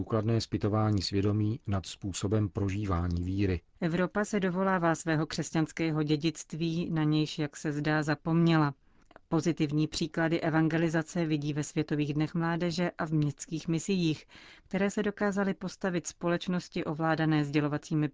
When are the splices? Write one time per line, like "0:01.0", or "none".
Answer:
0:03.7